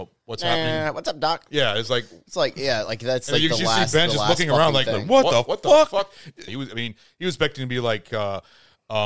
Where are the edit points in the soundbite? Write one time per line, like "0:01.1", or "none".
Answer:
0:06.5